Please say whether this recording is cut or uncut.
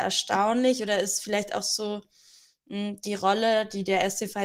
uncut